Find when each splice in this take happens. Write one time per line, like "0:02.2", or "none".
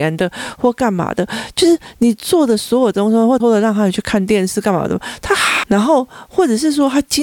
0:03.4
0:05.6